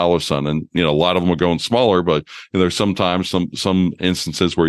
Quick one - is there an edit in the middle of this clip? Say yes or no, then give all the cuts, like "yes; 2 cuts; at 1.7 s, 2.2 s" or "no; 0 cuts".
no; 0 cuts